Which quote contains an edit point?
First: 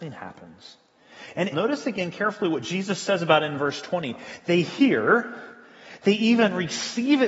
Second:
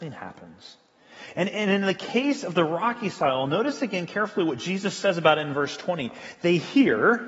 first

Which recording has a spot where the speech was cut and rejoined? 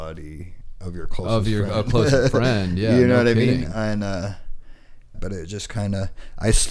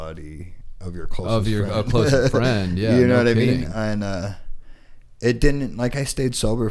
first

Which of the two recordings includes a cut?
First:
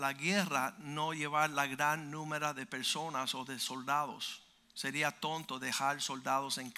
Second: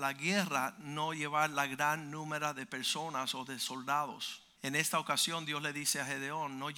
second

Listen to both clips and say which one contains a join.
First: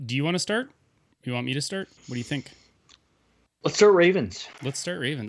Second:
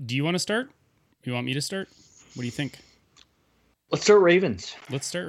first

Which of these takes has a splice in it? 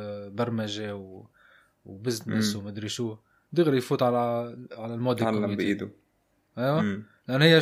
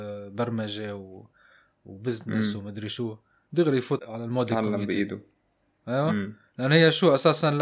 second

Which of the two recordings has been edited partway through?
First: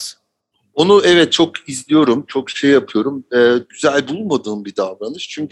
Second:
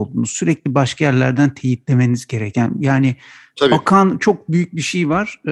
first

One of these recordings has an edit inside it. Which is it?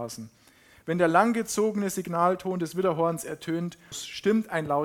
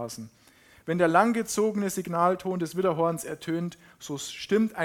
first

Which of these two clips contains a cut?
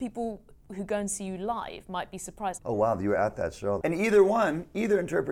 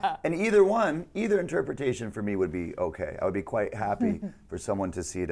first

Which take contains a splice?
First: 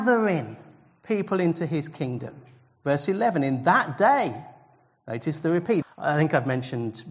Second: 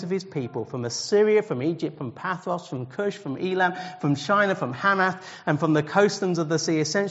first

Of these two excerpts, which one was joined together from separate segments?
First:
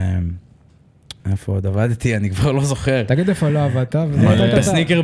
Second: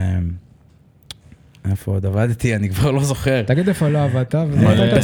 first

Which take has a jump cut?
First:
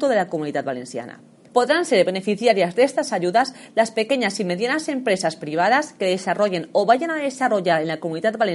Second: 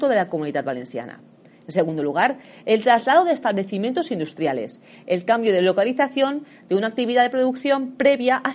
first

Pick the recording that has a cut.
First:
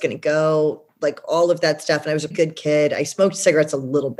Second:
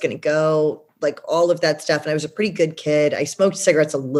first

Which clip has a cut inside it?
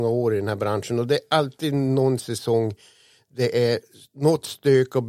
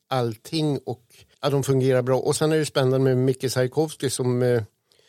second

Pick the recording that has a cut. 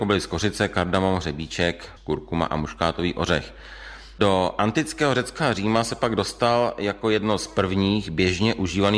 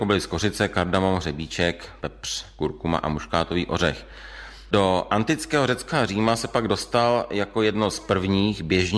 first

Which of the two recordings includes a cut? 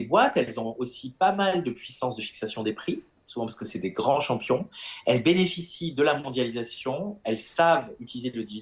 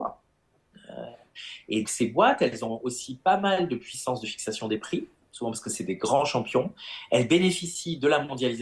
second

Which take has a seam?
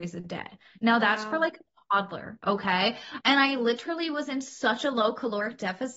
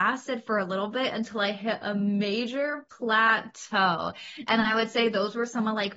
first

